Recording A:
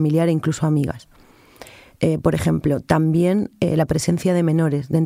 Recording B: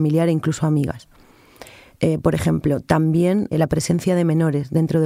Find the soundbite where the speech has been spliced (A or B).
B